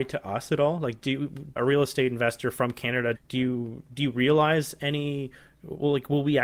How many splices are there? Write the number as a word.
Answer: two